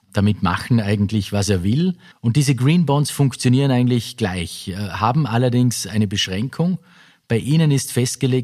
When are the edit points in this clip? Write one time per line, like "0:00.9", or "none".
0:02.1